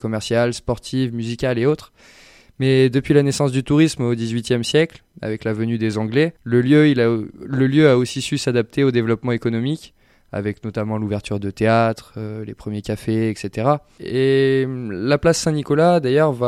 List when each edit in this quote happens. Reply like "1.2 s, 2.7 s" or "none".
6.4 s, 14.0 s